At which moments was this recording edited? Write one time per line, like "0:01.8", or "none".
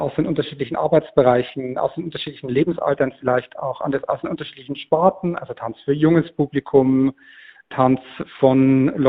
none